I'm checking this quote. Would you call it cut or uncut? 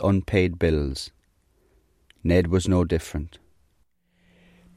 uncut